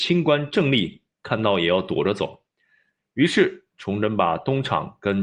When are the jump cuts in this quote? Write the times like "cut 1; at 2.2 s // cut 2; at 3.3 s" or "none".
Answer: cut 1; at 3.0 s